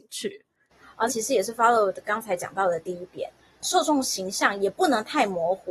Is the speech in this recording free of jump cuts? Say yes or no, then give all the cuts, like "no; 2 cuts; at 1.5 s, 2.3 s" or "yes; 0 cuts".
no; 1 cut; at 1.1 s